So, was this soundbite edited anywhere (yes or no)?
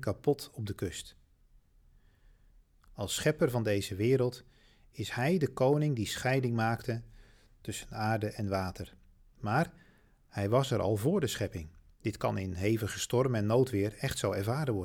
yes